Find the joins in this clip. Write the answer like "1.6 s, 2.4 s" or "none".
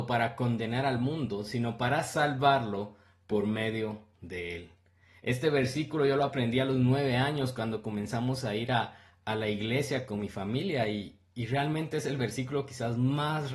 none